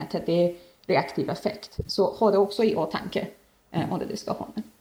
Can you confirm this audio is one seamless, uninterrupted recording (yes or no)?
yes